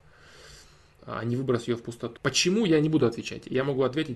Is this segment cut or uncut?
cut